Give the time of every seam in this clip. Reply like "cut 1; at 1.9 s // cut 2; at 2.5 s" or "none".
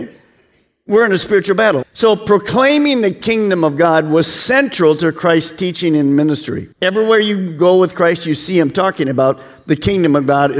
cut 1; at 1.8 s // cut 2; at 6.7 s